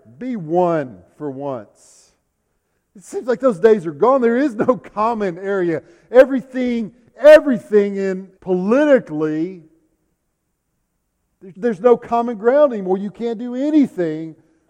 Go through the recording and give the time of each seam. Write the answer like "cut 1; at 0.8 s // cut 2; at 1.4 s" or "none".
cut 1; at 8.3 s // cut 2; at 11.5 s